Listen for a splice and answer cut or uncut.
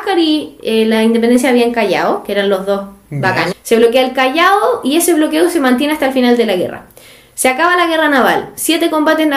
cut